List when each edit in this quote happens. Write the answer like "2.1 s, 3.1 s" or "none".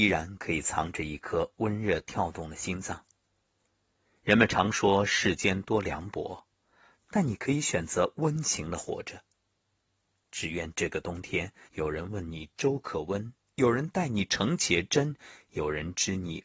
11.7 s